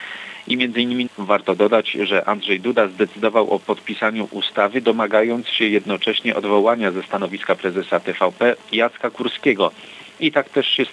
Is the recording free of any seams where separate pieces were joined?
no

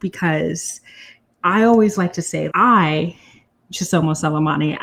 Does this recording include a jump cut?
yes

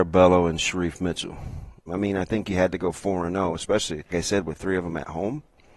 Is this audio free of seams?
no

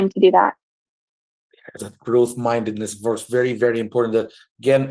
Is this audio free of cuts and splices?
no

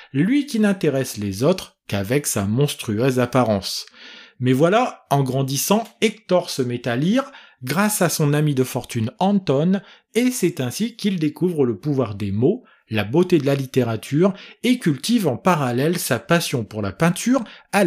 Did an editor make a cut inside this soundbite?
no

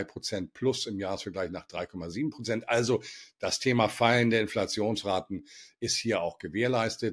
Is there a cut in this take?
no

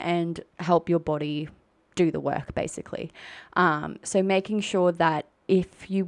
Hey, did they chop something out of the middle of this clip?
no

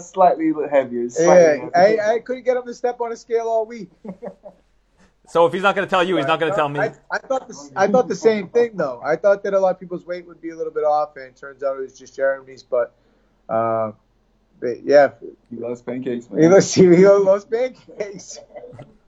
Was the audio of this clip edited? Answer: no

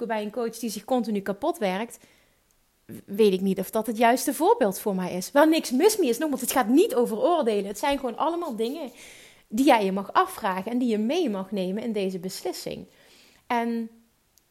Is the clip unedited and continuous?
yes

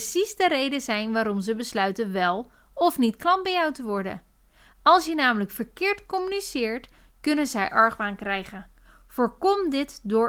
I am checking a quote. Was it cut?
no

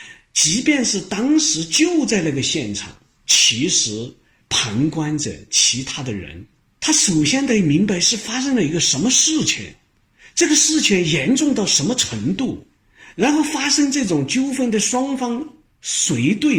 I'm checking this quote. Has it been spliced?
no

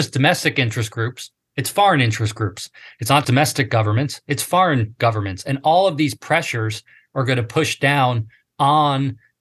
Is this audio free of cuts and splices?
no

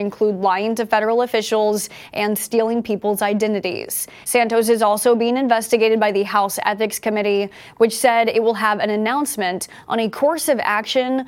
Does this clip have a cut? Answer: yes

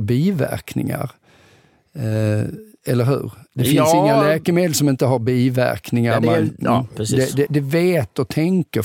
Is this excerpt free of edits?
no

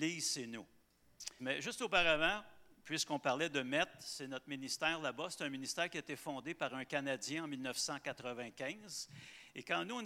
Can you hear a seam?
yes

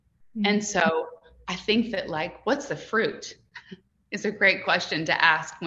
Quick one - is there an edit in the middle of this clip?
no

